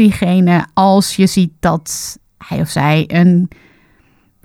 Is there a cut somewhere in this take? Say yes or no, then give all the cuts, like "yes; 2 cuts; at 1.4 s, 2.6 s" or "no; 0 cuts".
no; 0 cuts